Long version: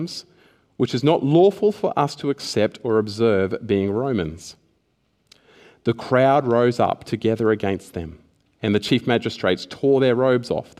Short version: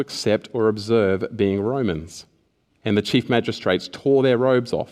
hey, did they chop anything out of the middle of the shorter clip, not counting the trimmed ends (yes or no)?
yes